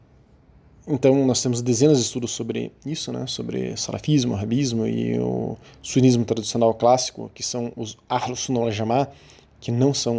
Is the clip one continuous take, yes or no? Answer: yes